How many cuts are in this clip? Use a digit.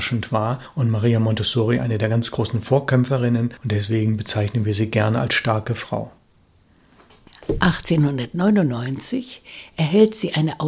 0